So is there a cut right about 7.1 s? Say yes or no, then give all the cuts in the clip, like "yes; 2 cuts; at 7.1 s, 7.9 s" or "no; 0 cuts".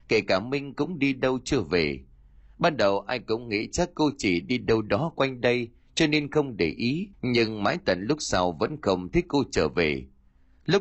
yes; 1 cut; at 7.1 s